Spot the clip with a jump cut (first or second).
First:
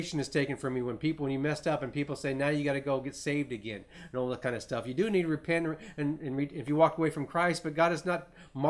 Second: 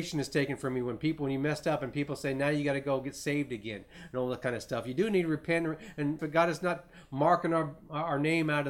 second